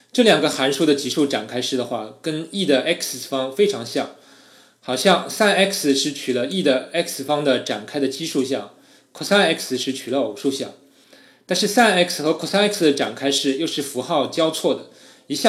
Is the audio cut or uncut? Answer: uncut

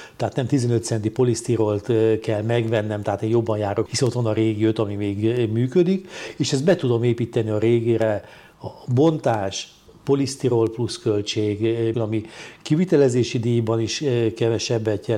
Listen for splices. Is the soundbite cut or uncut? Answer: cut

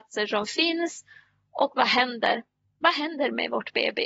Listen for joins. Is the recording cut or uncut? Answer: uncut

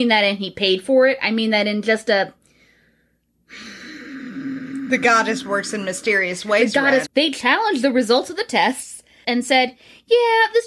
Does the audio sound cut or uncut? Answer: cut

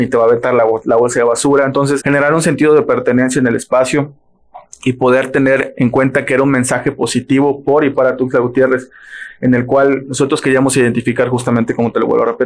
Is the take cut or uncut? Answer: cut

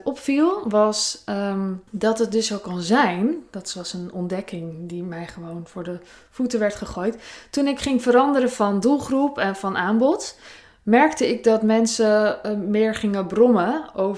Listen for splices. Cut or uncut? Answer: cut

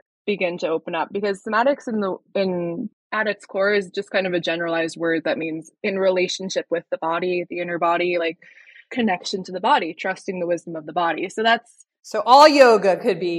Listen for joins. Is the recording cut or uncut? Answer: uncut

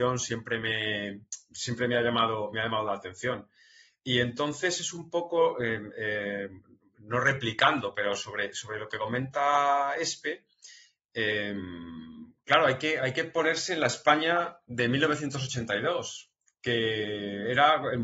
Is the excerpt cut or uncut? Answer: uncut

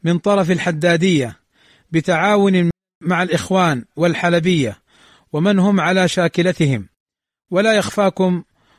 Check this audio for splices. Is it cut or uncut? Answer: uncut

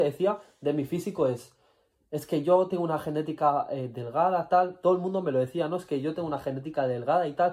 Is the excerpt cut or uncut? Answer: uncut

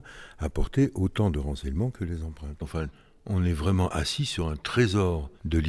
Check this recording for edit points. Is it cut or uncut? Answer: cut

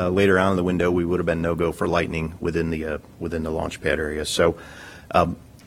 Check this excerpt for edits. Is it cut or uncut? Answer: uncut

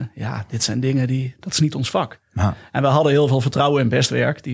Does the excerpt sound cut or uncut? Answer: uncut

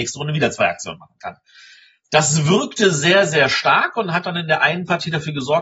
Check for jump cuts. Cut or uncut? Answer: uncut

